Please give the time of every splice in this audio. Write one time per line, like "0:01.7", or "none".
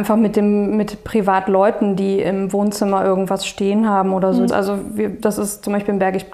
0:04.5